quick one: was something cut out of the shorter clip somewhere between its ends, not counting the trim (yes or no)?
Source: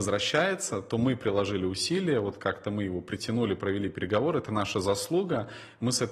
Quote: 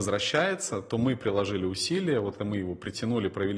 yes